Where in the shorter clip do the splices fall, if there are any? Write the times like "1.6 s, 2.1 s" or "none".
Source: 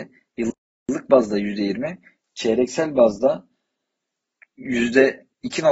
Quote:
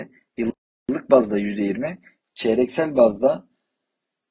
none